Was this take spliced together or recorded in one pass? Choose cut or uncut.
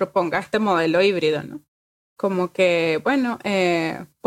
uncut